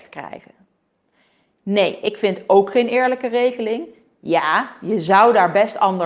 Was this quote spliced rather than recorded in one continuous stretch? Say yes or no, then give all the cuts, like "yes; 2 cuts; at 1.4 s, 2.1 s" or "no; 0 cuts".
no; 0 cuts